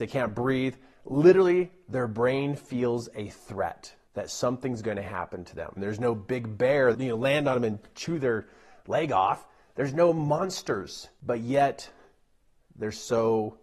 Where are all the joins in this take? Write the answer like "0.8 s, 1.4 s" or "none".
5.8 s, 6.9 s